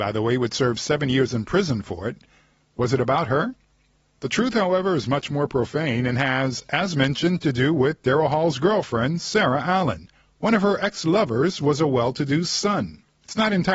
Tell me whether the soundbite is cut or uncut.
uncut